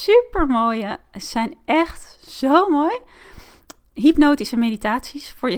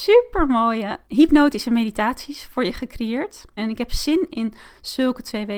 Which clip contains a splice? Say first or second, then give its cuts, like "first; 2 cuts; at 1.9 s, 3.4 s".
second; 2 cuts; at 1.0 s, 3.6 s